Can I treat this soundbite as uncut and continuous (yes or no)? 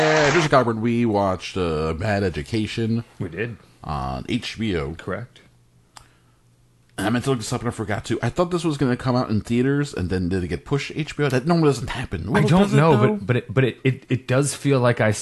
yes